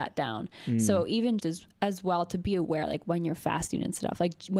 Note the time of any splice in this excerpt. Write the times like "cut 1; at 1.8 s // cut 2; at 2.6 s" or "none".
cut 1; at 1.4 s